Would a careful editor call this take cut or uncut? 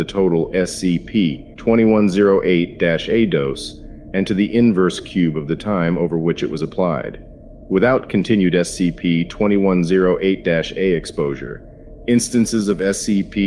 uncut